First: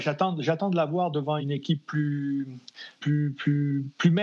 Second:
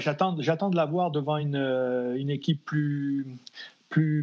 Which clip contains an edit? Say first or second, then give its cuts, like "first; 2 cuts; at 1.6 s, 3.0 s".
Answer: first; 2 cuts; at 1.4 s, 3.0 s